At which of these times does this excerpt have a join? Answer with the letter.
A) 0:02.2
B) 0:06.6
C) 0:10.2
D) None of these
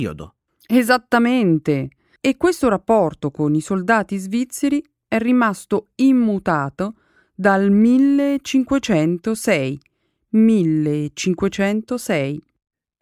A